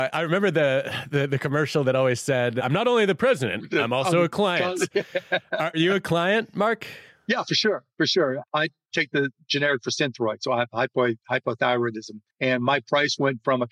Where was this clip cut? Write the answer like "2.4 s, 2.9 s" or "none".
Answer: none